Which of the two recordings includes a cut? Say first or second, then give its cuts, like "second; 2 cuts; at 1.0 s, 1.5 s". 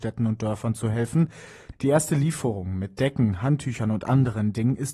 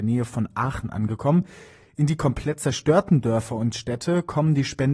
first; 1 cut; at 1.7 s